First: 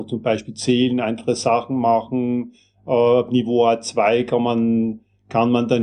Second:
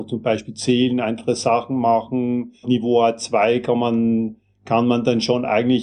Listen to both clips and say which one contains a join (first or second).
second